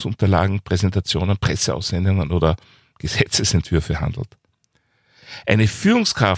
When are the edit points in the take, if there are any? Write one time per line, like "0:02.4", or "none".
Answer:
none